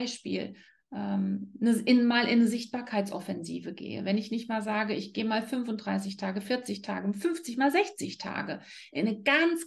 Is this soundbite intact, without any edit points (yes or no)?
yes